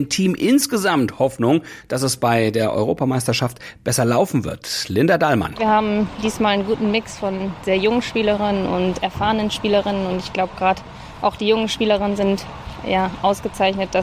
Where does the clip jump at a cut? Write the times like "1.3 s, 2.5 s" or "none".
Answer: none